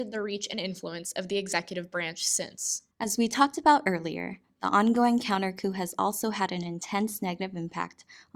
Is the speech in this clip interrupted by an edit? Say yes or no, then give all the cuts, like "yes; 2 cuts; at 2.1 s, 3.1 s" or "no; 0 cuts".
yes; 1 cut; at 2.9 s